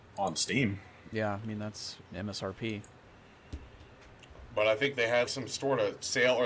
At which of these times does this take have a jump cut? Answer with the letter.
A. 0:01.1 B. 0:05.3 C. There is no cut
B